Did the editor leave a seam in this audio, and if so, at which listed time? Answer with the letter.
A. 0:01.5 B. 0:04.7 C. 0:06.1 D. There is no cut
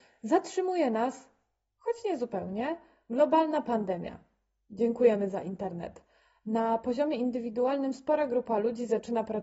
D